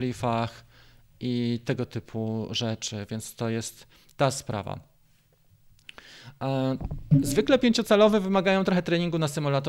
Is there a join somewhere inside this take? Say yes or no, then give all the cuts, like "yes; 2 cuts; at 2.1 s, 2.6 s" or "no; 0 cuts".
no; 0 cuts